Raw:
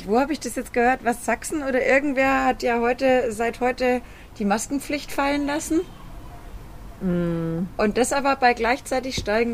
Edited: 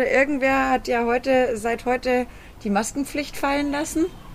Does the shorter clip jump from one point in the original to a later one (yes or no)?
no